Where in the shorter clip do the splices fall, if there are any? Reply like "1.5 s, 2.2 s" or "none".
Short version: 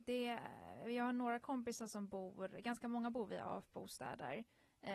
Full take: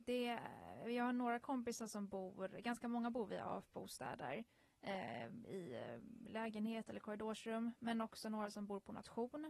none